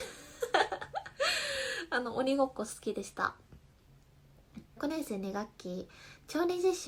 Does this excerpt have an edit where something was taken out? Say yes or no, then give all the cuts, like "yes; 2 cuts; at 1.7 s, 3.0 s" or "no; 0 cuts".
yes; 1 cut; at 4.8 s